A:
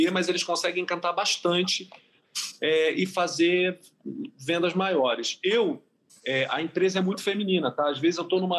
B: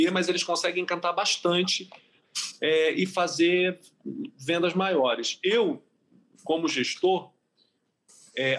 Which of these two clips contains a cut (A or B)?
A